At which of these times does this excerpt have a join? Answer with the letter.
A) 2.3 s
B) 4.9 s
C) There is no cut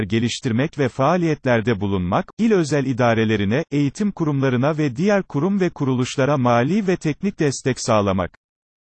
A